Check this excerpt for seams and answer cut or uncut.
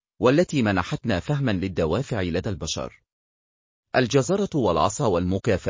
uncut